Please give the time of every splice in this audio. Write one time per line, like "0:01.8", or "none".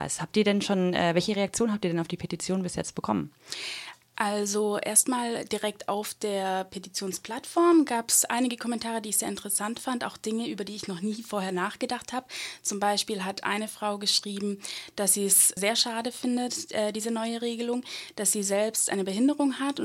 0:15.6